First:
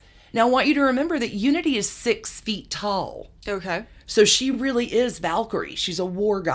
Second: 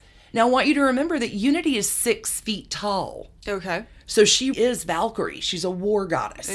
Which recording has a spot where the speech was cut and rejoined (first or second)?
second